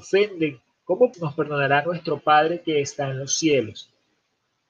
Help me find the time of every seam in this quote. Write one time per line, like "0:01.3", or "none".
0:01.1